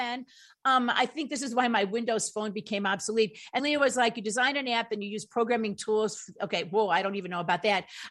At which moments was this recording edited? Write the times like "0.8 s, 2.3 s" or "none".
3.6 s